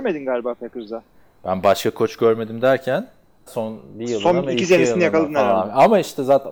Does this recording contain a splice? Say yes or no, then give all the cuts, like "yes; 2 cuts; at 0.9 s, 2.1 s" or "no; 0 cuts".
yes; 1 cut; at 3.5 s